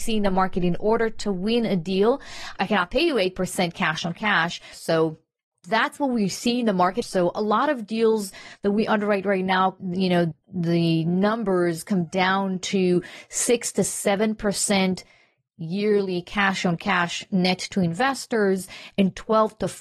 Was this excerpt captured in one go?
no; 2 cuts; at 4.7 s, 7.0 s

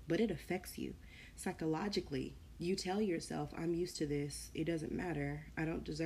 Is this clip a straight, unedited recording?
no; 1 cut; at 2.5 s

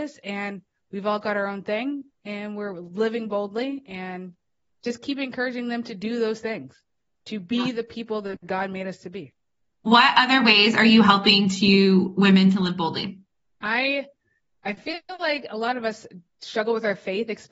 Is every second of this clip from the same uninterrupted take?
no; 1 cut; at 9.7 s

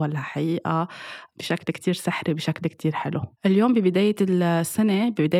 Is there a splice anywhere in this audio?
yes; 1 cut; at 3.4 s

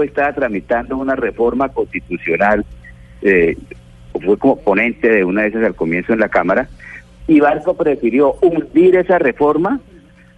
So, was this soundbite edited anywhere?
yes; 2 cuts; at 4.1 s, 7.2 s

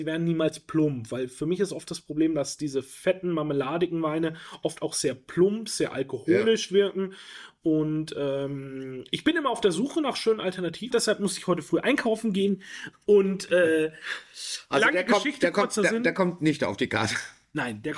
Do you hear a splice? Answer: yes; 1 cut; at 10.9 s

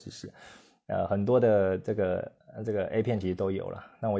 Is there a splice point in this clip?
no; 0 cuts

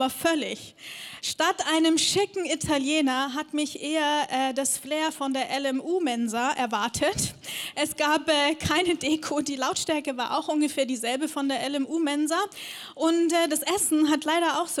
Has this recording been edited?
no; 0 cuts

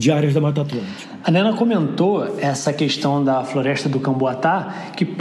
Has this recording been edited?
no; 0 cuts

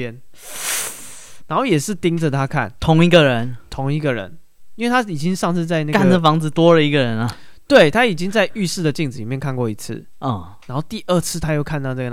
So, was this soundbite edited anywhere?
no; 0 cuts

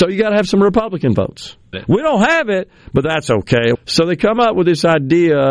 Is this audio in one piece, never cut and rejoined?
no; 2 cuts; at 1.7 s, 3.7 s

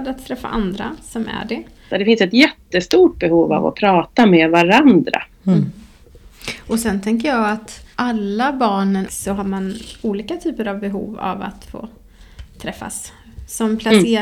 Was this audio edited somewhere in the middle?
yes; 3 cuts; at 1.9 s, 7.9 s, 9.1 s

